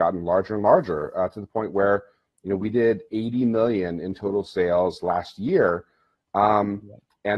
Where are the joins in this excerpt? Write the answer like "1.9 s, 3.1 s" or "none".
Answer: none